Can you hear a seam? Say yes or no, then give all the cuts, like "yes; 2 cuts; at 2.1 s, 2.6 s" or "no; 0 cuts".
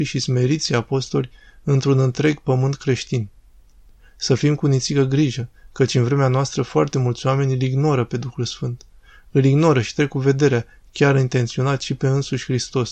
no; 0 cuts